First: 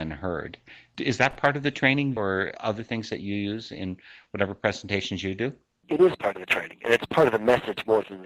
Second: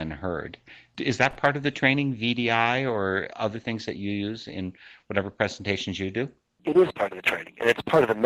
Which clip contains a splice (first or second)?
first